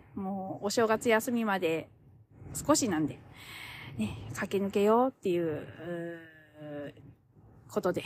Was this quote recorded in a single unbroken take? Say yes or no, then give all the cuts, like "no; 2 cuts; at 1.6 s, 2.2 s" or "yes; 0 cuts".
yes; 0 cuts